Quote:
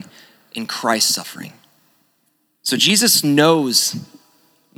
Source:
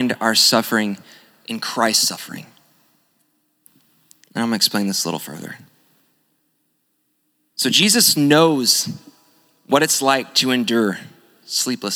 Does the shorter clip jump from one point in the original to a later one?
yes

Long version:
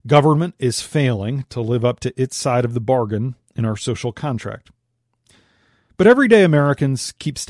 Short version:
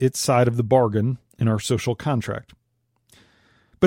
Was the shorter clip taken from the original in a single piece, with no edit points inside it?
yes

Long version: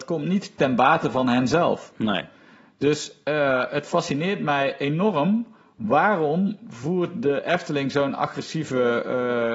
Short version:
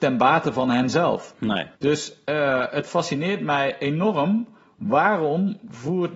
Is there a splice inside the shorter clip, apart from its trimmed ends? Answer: yes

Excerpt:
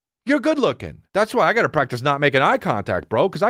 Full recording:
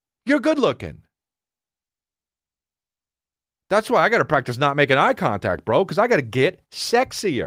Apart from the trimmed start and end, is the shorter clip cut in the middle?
yes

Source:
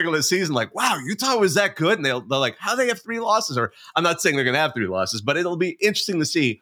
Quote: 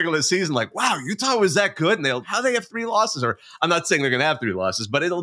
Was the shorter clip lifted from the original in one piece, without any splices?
no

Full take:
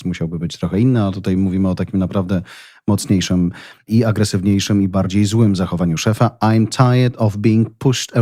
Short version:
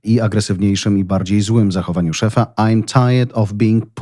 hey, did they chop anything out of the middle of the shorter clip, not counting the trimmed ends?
no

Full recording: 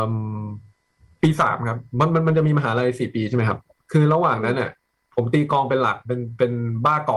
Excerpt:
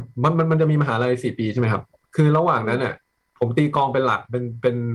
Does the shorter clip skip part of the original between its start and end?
no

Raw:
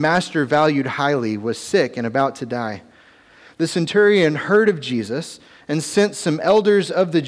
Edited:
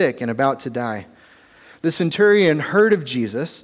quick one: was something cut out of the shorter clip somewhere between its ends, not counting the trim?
no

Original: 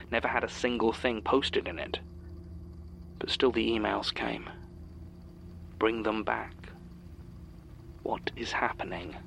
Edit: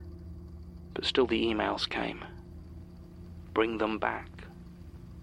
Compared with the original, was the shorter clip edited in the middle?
no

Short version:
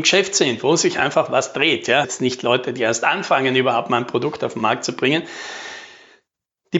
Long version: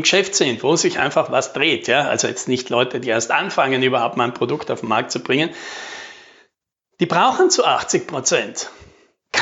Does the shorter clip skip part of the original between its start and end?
yes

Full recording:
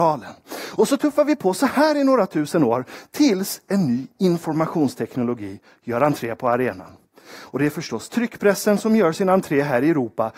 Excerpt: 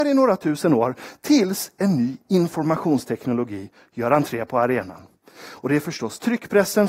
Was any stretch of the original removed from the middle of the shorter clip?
no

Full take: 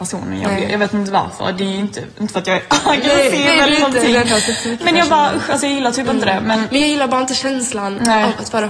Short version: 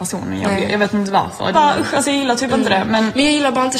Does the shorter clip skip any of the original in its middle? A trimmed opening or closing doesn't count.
yes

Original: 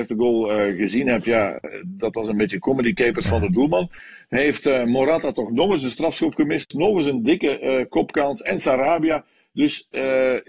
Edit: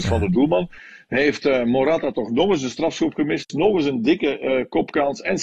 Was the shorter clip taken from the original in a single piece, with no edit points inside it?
yes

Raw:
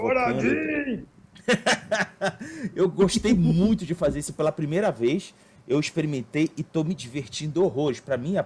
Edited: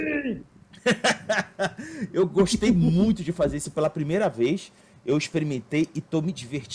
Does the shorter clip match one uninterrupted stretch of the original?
yes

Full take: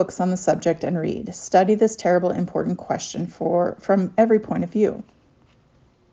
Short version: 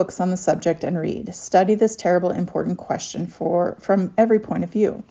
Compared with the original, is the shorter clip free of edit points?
yes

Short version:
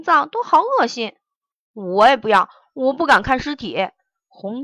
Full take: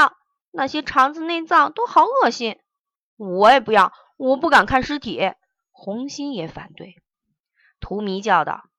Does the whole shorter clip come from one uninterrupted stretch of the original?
yes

